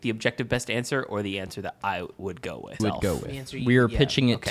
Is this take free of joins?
no; 1 cut; at 2.8 s

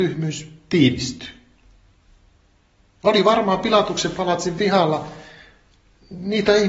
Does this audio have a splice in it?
no; 0 cuts

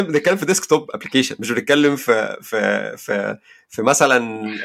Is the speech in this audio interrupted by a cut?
no; 0 cuts

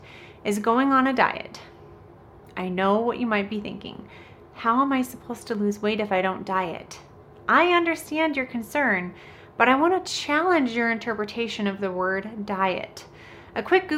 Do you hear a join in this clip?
no; 0 cuts

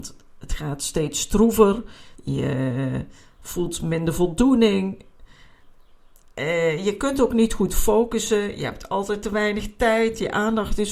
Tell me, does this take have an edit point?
yes; 1 cut; at 2.1 s

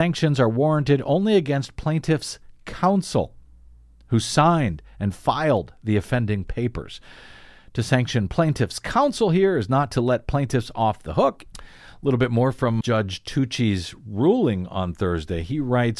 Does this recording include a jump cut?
yes; 2 cuts; at 11.5 s, 12.8 s

